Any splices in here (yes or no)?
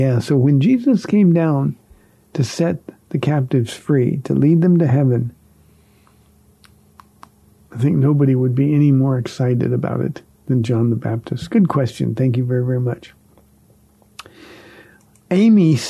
no